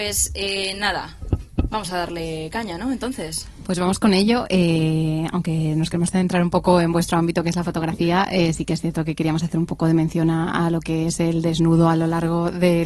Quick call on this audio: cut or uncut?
uncut